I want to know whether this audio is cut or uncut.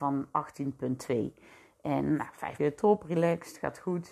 cut